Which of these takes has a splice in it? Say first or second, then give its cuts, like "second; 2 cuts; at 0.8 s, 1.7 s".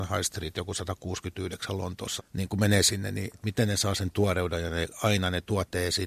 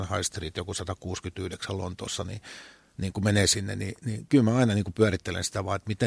first; 2 cuts; at 2.2 s, 3.3 s